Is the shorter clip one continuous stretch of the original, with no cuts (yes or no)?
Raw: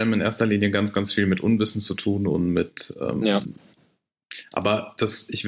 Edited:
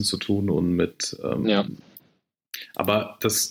yes